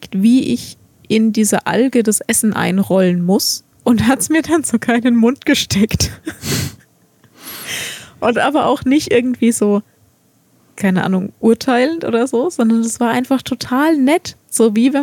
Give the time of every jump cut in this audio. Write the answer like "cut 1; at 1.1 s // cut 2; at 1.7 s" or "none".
cut 1; at 3.7 s